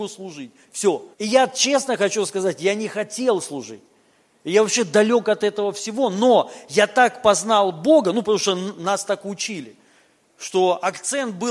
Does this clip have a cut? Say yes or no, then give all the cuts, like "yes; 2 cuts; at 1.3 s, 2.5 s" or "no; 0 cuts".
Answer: yes; 1 cut; at 1.1 s